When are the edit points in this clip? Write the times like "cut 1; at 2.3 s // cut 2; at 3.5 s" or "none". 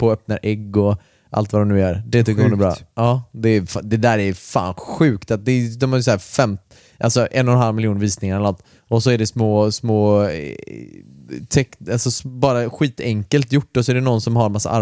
none